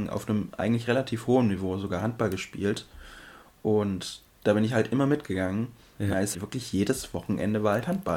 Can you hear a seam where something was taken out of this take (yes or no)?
yes